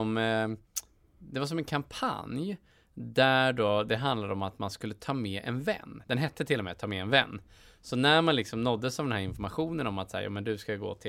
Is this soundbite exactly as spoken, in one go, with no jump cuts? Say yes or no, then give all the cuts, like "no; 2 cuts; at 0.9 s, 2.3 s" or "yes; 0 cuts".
yes; 0 cuts